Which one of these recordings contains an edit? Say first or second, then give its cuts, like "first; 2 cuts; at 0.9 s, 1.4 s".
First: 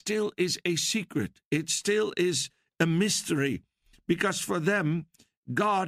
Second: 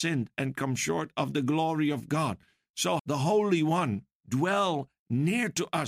second; 2 cuts; at 3.0 s, 4.2 s